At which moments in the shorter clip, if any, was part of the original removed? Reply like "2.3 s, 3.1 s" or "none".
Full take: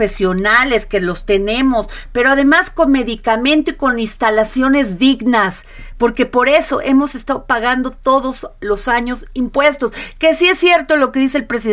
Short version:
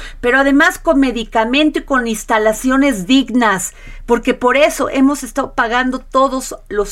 none